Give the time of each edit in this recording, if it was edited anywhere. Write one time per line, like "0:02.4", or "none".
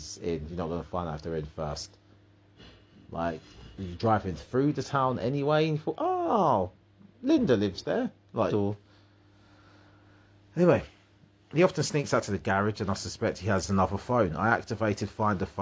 0:08.5